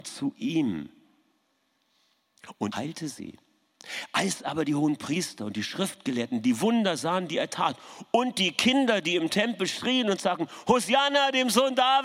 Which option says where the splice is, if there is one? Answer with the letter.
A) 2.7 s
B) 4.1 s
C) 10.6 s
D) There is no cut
A